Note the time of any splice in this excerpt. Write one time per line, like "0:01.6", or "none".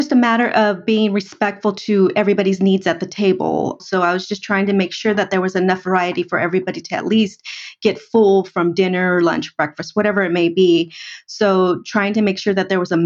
0:03.8